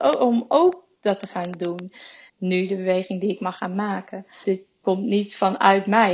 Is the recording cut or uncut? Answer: cut